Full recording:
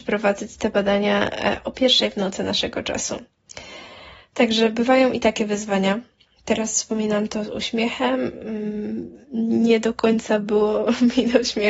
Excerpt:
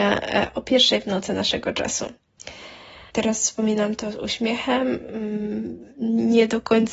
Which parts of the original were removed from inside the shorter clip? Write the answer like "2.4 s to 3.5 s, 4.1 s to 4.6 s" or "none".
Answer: 4.2 s to 6.4 s